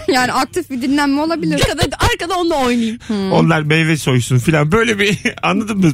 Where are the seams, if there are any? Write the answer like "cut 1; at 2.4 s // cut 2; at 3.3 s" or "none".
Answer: cut 1; at 1.6 s // cut 2; at 3.0 s